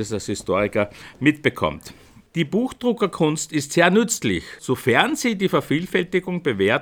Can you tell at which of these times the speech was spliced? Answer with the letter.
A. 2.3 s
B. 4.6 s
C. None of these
B